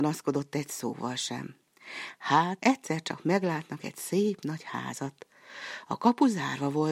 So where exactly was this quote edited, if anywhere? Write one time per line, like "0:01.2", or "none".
0:02.6